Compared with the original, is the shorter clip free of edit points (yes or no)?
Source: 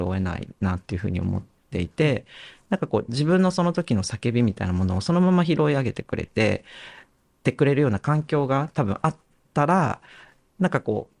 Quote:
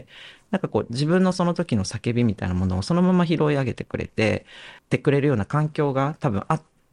no